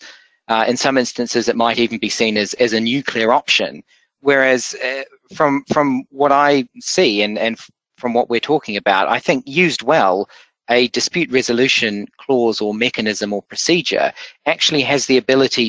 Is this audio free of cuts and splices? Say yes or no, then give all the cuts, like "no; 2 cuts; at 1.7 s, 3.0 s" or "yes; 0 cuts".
yes; 0 cuts